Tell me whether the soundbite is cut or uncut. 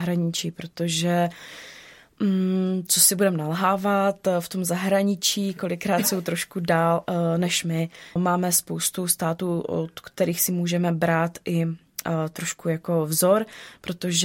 cut